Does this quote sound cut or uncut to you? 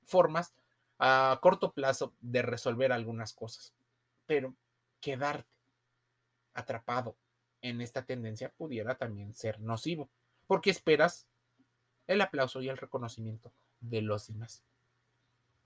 uncut